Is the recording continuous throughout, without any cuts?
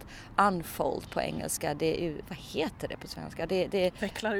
yes; 0 cuts

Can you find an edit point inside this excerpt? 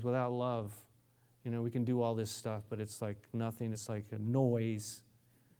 no; 0 cuts

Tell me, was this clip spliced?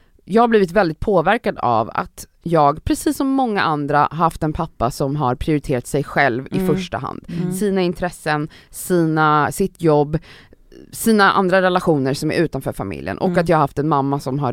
no; 0 cuts

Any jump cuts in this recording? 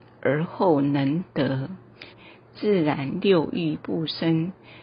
yes; 1 cut; at 2.1 s

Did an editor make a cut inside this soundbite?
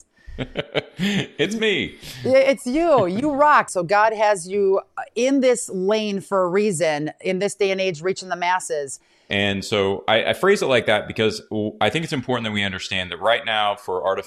yes; 2 cuts; at 3.7 s, 9.3 s

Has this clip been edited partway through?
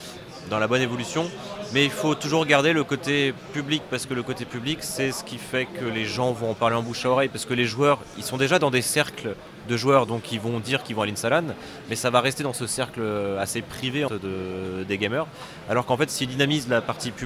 yes; 1 cut; at 14.1 s

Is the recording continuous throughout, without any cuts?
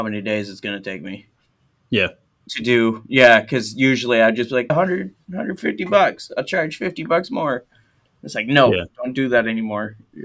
no; 2 cuts; at 2.5 s, 4.7 s

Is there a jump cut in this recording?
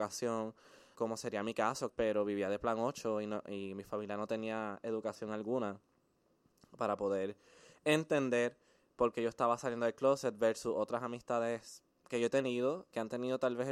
yes; 1 cut; at 1.9 s

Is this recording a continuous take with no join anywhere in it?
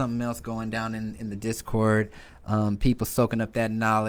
yes; 0 cuts

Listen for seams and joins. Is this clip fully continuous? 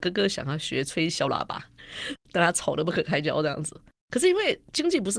no; 2 cuts; at 2.2 s, 3.9 s

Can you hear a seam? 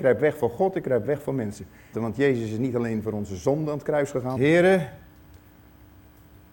yes; 2 cuts; at 1.9 s, 4.4 s

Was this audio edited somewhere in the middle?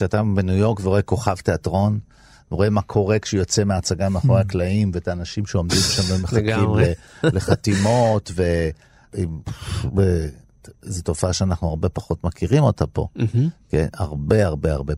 no; 0 cuts

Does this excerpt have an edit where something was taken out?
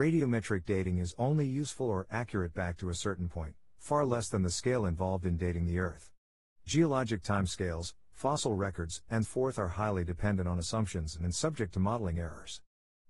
yes; 1 cut; at 9.2 s

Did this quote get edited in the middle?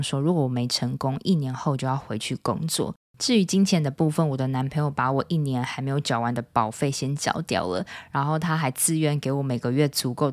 no; 0 cuts

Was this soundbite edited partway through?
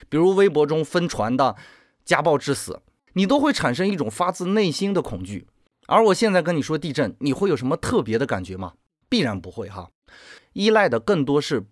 yes; 3 cuts; at 3.1 s, 5.7 s, 10.4 s

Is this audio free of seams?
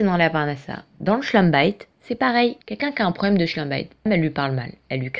no; 2 cuts; at 2.6 s, 4.1 s

